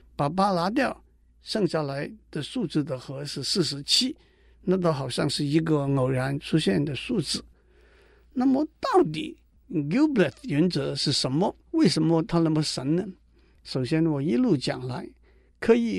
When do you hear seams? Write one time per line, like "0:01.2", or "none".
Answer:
0:11.6